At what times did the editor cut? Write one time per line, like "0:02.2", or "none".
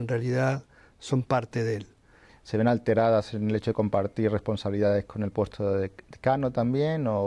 0:02.3